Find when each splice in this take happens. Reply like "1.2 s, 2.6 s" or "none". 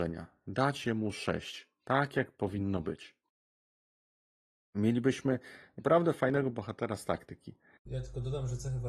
7.9 s

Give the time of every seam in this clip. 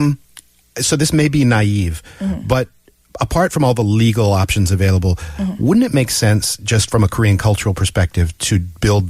none

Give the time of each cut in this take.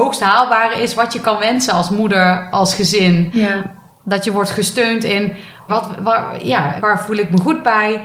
5.7 s, 6.8 s

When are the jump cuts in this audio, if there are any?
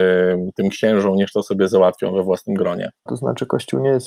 3.1 s

